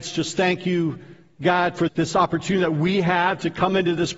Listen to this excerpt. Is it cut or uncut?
cut